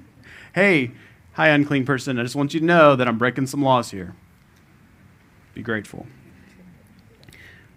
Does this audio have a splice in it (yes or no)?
no